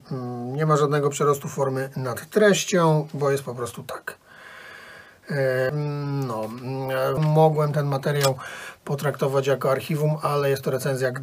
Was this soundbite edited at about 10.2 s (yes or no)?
no